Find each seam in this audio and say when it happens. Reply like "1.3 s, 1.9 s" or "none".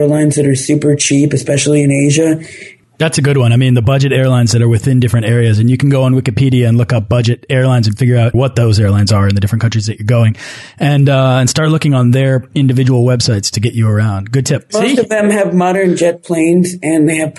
none

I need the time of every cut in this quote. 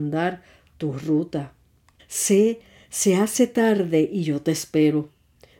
2.0 s

